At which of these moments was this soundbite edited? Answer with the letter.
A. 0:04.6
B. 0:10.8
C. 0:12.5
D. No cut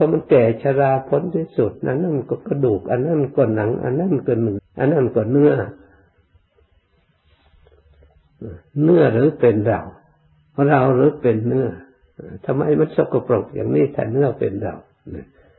A